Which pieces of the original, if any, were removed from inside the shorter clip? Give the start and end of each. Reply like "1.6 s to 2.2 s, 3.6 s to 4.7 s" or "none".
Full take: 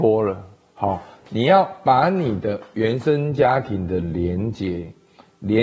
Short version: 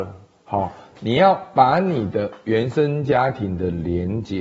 none